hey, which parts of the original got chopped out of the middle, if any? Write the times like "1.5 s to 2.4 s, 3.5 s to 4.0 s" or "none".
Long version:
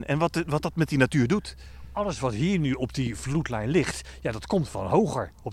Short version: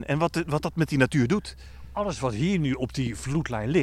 none